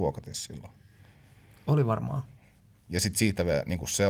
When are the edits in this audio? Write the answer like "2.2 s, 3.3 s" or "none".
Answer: none